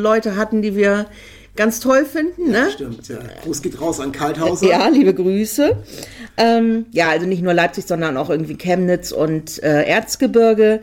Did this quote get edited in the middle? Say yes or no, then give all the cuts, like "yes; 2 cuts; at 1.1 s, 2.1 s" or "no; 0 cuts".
no; 0 cuts